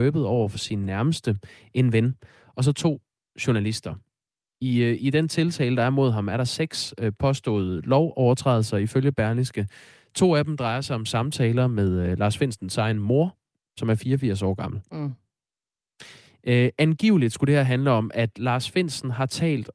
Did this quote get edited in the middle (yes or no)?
no